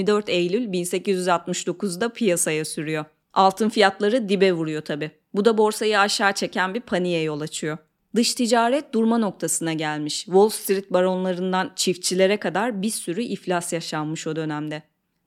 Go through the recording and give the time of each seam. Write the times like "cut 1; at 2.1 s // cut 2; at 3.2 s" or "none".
none